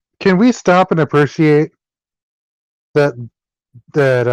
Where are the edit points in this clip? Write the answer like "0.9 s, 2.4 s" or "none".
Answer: none

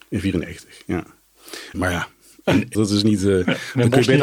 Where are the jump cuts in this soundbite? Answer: 1.7 s, 2.7 s

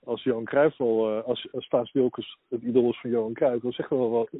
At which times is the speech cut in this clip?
none

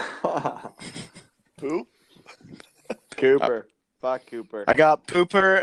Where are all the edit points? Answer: none

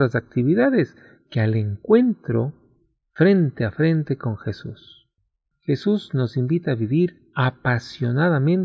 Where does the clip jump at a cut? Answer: 5.5 s

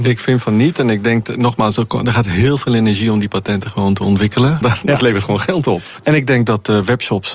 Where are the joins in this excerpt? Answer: 4.6 s, 6.0 s

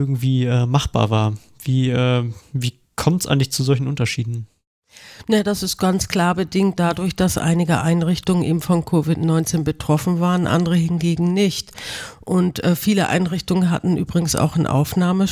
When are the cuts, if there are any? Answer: none

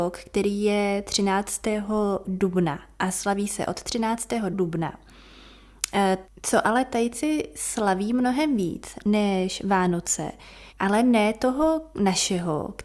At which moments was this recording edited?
4.5 s, 6.2 s, 10.7 s

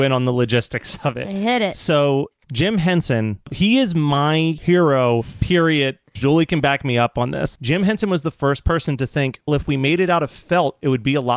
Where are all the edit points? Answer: 6.2 s, 7.6 s, 9.5 s

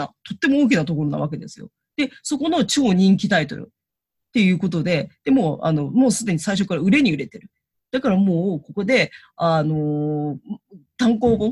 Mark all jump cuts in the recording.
none

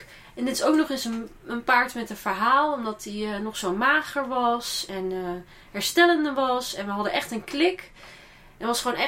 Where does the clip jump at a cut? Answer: none

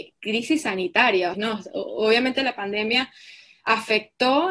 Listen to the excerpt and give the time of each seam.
1.3 s

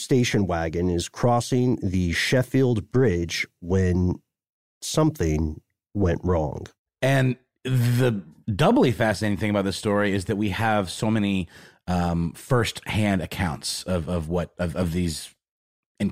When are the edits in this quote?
none

